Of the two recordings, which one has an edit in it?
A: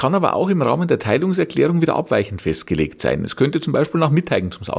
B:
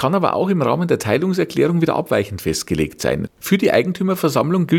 B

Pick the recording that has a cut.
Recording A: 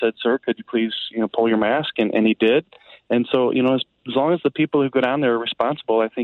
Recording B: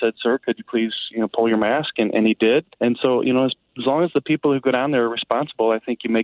B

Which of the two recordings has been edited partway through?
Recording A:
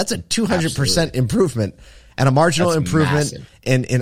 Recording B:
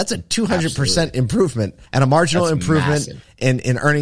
B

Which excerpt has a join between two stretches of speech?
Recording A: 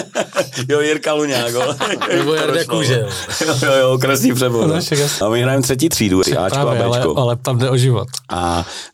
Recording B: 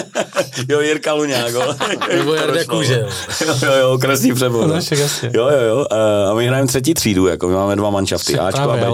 A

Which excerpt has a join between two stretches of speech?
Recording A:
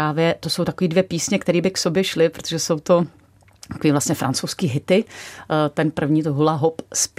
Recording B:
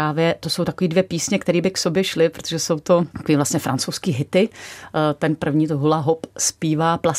B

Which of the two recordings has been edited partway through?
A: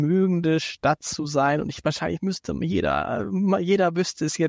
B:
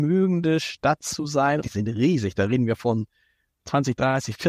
B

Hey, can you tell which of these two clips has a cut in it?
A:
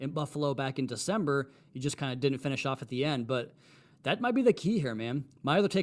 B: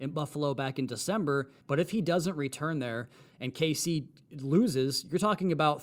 B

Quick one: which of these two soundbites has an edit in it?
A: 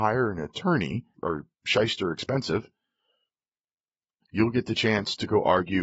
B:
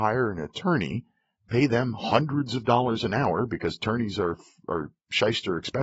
A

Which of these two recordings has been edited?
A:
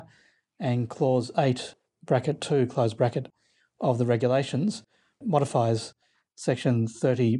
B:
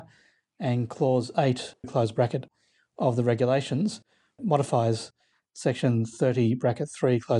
B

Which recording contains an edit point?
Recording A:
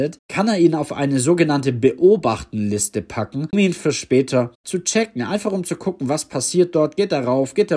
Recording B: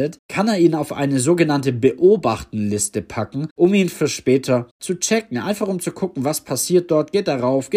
A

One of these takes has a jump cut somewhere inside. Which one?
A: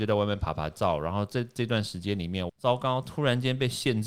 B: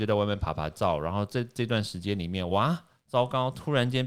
A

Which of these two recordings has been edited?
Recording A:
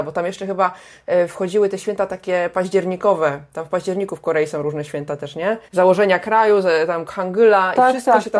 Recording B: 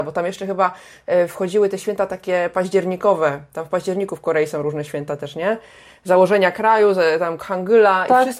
A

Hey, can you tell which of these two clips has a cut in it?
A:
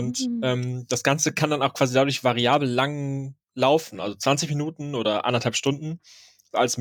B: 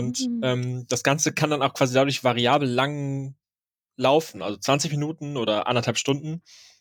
A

